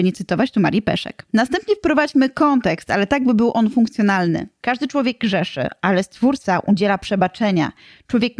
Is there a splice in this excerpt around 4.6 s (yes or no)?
yes